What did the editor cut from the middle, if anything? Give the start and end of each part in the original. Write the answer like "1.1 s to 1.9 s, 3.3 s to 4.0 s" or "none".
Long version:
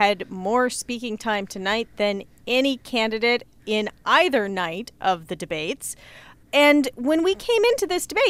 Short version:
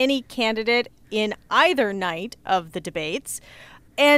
none